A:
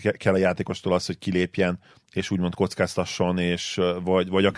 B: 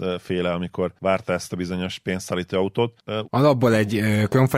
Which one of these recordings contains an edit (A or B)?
B